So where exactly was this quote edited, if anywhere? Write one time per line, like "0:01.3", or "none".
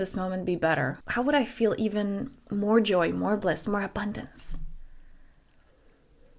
0:01.0
0:03.7